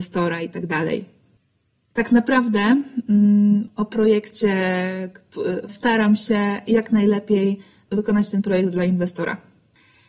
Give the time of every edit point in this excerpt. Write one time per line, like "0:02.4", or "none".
0:03.7
0:05.7